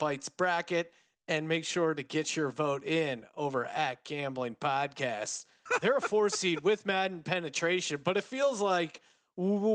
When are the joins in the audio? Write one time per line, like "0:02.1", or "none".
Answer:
0:05.7

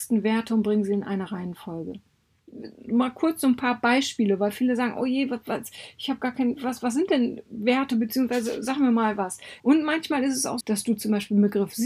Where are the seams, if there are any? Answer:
0:09.6
0:10.6

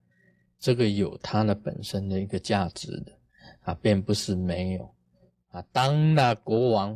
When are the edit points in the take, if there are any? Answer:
none

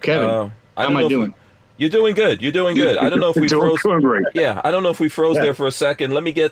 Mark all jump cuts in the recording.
none

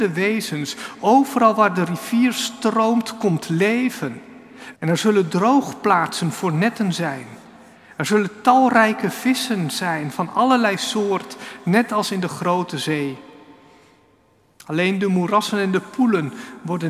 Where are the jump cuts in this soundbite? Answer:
0:04.7

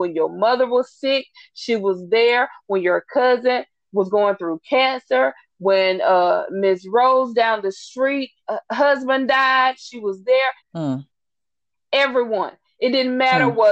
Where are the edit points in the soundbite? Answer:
0:08.4
0:10.6

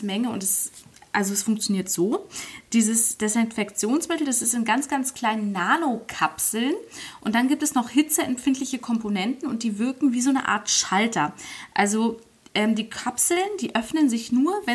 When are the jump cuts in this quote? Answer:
none

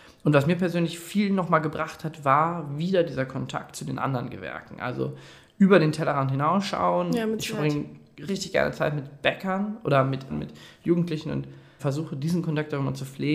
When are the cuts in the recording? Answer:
0:08.3
0:10.3
0:11.8

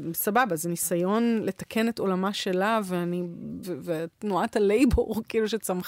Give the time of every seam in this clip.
0:03.6

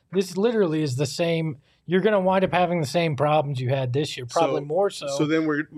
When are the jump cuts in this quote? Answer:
none

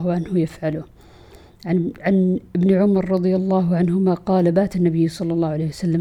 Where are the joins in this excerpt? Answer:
none

